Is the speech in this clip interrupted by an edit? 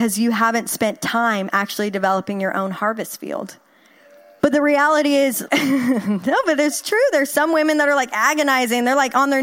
yes; 2 cuts; at 4.4 s, 5.5 s

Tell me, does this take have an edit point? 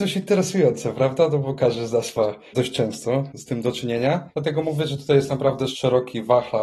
no; 0 cuts

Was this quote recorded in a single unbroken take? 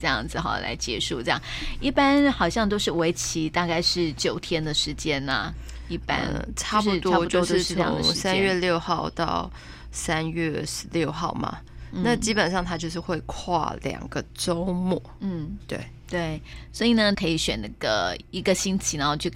no; 1 cut; at 17.1 s

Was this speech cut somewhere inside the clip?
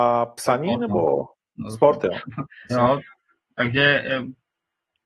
yes; 1 cut; at 2.7 s

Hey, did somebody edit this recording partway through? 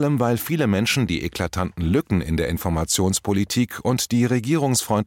no; 0 cuts

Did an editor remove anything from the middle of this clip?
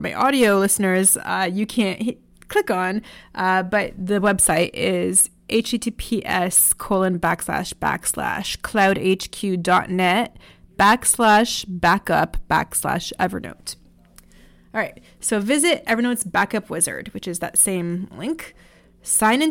no; 0 cuts

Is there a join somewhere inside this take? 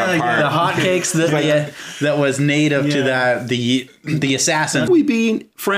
yes; 1 cut; at 4.9 s

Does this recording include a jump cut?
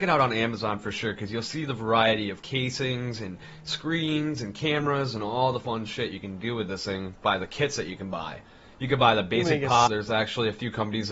yes; 1 cut; at 9.9 s

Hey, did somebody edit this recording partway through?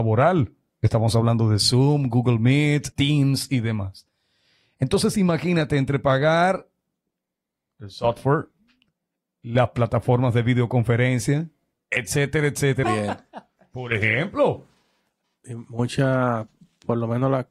yes; 3 cuts; at 2.9 s, 11.7 s, 12.8 s

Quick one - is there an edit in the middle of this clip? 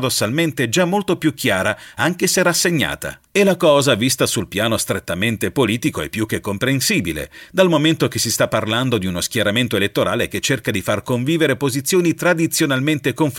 yes; 1 cut; at 3.2 s

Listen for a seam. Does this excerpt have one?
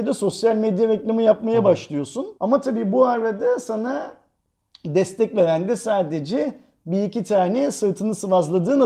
yes; 1 cut; at 2.4 s

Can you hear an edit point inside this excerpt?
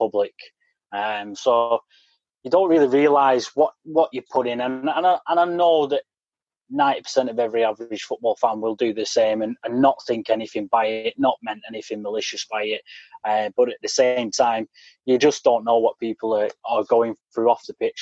no; 0 cuts

